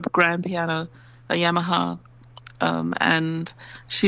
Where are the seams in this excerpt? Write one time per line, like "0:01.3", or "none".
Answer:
none